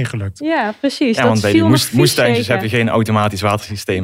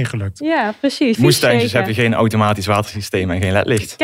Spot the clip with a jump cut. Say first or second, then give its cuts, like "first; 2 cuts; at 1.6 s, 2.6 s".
second; 1 cut; at 1.2 s